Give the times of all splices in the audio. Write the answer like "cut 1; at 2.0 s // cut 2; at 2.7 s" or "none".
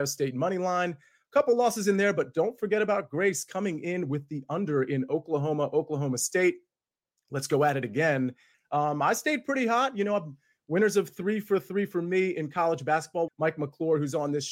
cut 1; at 8.5 s // cut 2; at 13.3 s